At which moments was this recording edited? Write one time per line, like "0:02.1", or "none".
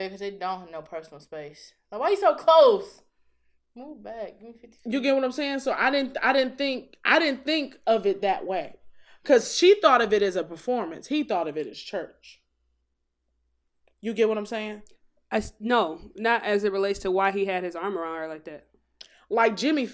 none